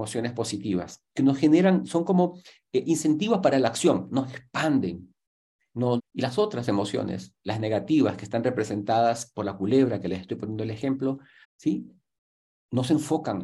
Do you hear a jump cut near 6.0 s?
yes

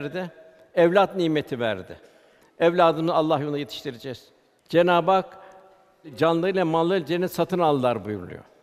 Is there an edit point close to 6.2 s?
no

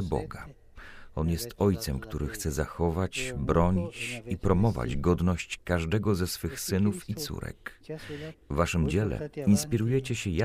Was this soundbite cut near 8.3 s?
yes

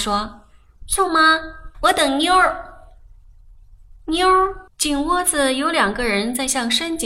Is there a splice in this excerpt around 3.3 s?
no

